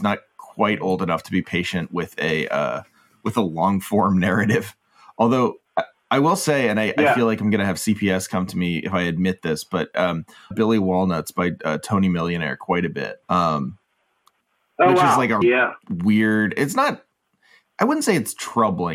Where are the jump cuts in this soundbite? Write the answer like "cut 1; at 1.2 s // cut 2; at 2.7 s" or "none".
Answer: cut 1; at 10.5 s // cut 2; at 13.2 s // cut 3; at 15.4 s